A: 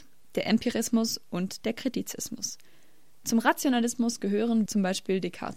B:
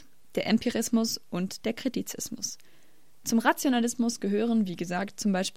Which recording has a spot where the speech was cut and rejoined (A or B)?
A